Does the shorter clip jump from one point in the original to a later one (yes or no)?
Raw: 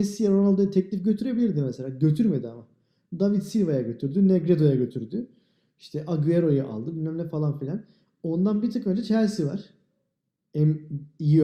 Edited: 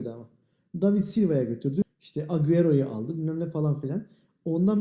yes